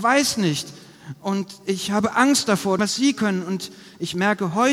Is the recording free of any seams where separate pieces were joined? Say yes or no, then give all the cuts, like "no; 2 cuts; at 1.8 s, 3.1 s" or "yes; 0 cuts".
no; 1 cut; at 2.8 s